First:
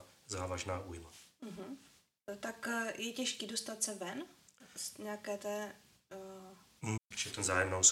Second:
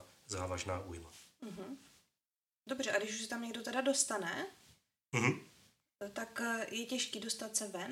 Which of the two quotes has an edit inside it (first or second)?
first